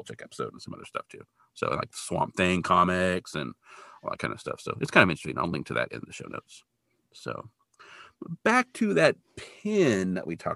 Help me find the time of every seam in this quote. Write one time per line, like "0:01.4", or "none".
none